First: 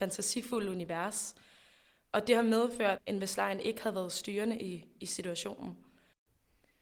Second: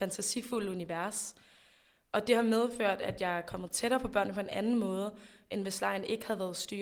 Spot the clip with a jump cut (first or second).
first